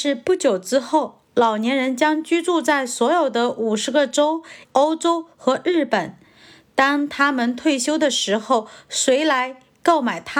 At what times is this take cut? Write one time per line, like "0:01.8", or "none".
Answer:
0:04.6